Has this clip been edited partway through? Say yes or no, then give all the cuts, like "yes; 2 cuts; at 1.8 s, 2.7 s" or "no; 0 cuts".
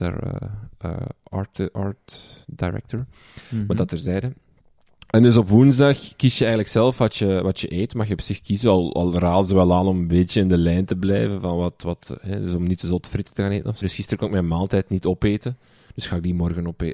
yes; 1 cut; at 13.8 s